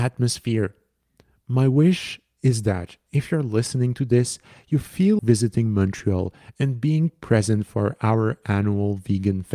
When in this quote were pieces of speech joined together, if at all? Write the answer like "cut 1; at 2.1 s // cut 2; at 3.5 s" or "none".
cut 1; at 5.2 s